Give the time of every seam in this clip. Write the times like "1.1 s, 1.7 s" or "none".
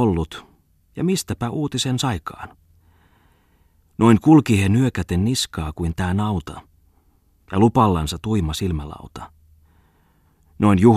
none